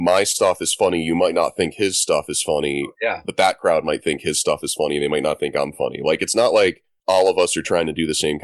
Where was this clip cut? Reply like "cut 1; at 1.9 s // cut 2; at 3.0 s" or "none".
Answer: none